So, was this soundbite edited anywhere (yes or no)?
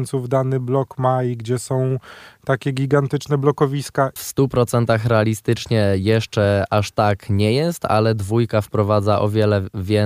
yes